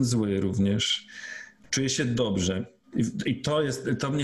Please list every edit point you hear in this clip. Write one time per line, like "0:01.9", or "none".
0:02.8